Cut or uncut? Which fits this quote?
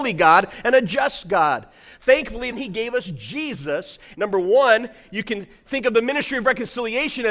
cut